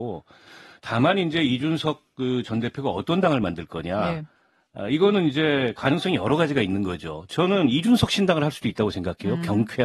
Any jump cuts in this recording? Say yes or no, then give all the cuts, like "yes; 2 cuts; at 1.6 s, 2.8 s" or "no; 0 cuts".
no; 0 cuts